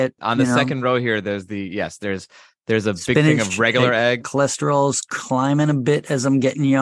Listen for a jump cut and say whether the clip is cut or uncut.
cut